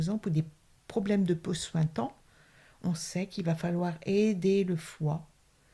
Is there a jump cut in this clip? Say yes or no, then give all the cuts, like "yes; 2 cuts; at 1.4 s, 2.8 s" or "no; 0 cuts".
no; 0 cuts